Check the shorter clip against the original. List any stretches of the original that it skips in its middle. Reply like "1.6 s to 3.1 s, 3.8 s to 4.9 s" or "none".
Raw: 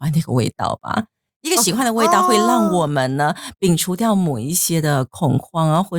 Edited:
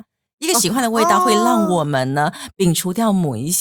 none